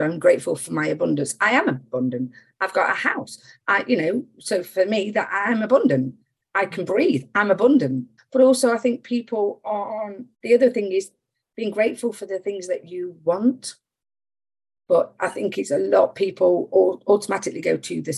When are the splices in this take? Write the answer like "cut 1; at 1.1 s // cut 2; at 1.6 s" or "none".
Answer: cut 1; at 8.2 s // cut 2; at 14.8 s